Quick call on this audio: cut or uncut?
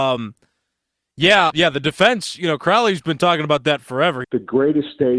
cut